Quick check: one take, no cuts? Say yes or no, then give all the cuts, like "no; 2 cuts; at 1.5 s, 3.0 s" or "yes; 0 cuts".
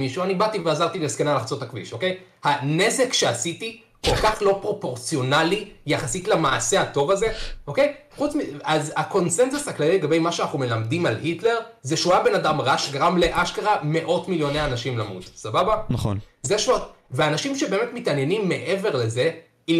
yes; 0 cuts